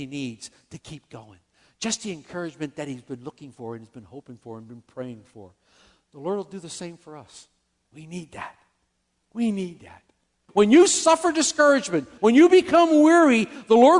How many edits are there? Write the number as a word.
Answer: three